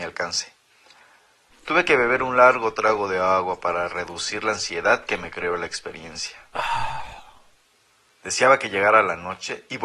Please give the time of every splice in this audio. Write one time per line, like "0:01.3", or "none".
0:01.5